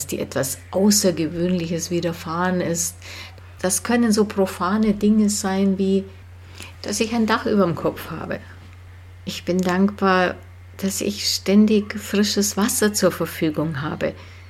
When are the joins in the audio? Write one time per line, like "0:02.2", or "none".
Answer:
0:03.6
0:06.7